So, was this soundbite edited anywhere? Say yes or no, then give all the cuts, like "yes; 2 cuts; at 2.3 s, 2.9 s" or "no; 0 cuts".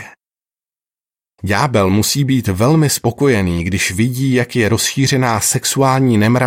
yes; 1 cut; at 1.4 s